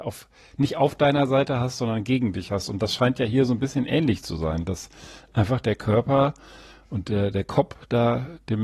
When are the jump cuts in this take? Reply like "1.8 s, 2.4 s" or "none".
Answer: none